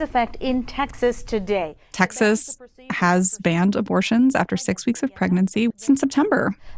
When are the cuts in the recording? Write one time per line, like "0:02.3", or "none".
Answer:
0:05.7